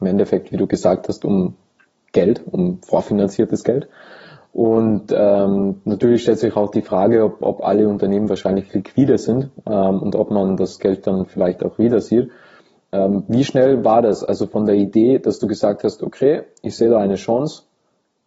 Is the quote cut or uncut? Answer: uncut